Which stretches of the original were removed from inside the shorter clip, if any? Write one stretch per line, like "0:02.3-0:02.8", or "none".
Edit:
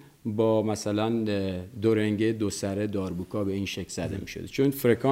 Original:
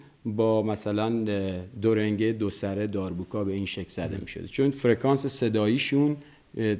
none